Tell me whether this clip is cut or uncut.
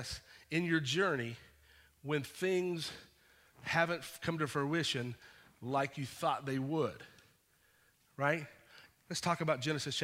uncut